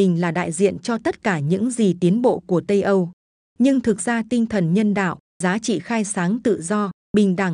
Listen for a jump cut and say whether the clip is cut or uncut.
uncut